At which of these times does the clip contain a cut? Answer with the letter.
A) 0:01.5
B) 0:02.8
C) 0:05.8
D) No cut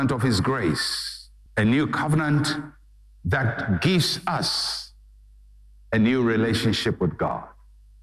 A